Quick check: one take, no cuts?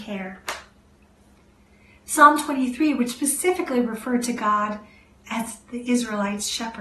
yes; 0 cuts

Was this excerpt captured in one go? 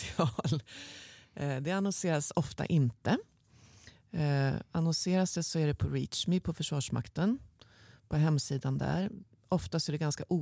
yes; 0 cuts

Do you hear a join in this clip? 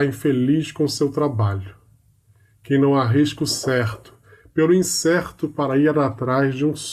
no; 0 cuts

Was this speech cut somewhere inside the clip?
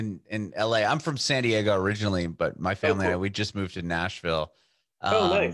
no; 0 cuts

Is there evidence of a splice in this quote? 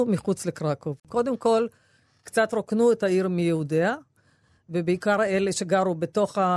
yes; 1 cut; at 1.0 s

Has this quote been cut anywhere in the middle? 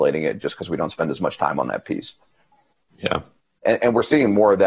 yes; 1 cut; at 3.6 s

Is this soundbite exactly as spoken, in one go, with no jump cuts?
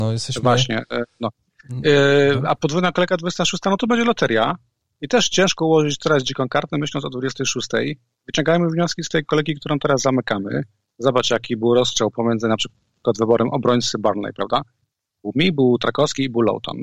yes; 0 cuts

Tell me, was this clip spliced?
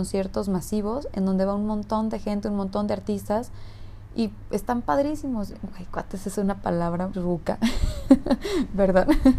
yes; 2 cuts; at 5.5 s, 7.1 s

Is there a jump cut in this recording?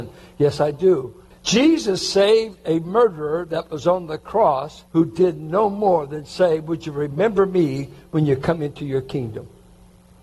yes; 2 cuts; at 1.3 s, 4.9 s

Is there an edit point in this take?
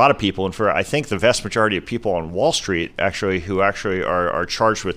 no; 0 cuts

